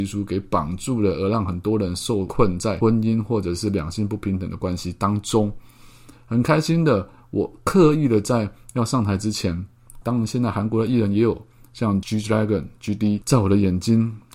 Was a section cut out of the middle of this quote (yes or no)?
yes